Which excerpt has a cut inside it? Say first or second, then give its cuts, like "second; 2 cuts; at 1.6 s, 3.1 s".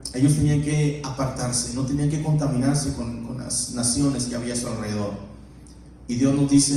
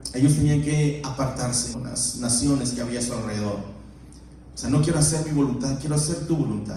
second; 2 cuts; at 1.7 s, 4.5 s